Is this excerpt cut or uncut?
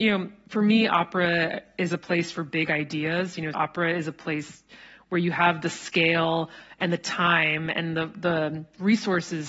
cut